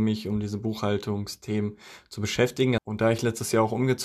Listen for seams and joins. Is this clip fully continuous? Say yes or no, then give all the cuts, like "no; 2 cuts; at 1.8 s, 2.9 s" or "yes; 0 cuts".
no; 1 cut; at 2.8 s